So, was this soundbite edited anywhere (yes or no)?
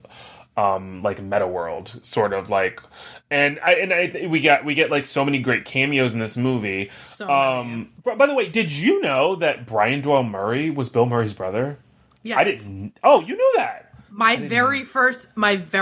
no